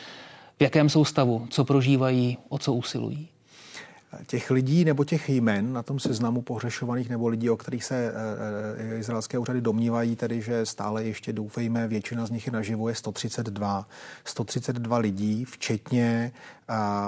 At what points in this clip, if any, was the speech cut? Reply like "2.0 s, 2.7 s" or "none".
none